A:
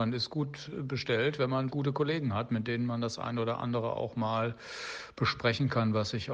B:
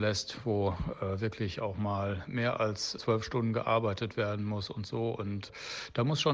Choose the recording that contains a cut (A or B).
A